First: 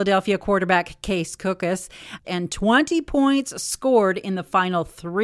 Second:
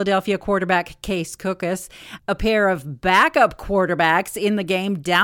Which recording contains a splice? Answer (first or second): first